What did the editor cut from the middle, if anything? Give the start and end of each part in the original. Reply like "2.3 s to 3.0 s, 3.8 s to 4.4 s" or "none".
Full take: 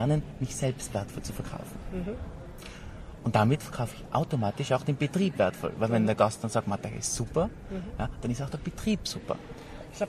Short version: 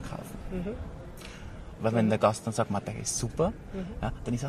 3.2 s to 5.7 s